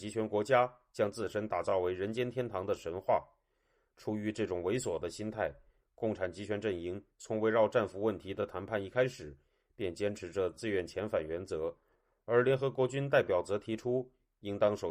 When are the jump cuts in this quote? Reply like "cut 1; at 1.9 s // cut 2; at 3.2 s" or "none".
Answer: none